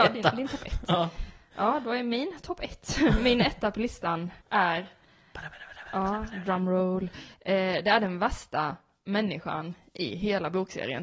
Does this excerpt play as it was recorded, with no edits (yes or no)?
no